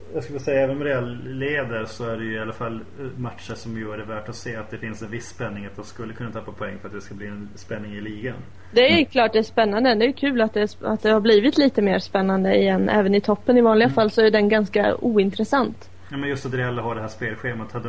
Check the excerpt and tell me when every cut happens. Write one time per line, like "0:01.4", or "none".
none